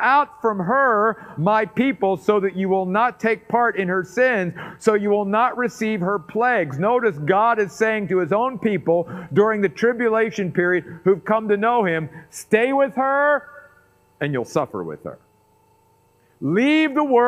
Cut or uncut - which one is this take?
uncut